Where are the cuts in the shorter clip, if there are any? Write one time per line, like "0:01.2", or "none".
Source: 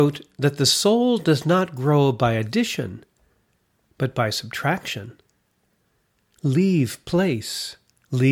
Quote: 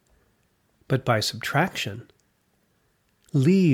none